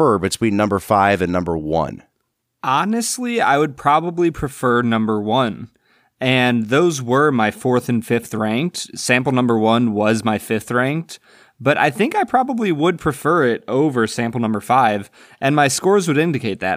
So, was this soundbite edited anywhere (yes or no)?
no